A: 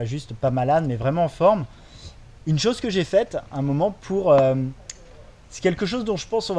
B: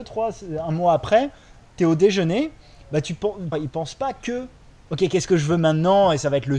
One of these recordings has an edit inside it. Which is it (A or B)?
B